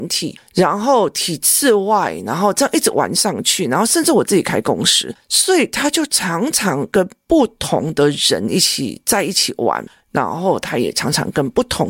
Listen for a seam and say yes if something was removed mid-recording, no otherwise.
no